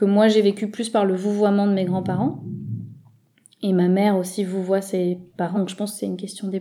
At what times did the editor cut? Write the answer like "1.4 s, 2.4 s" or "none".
5.5 s